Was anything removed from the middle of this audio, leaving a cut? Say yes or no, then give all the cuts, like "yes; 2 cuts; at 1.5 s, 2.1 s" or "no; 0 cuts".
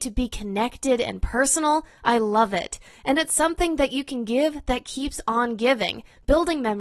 no; 0 cuts